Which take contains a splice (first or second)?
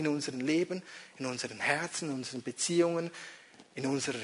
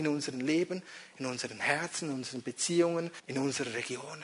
second